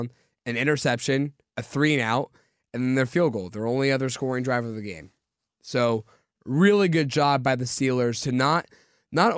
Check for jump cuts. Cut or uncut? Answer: cut